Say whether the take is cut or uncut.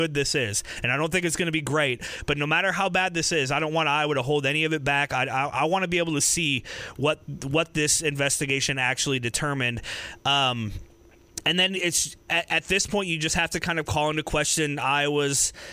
cut